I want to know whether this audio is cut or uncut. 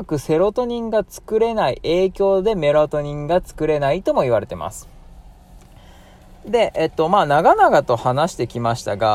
uncut